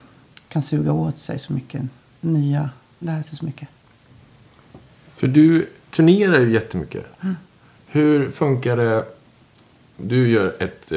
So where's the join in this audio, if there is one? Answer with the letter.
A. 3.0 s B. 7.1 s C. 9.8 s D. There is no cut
A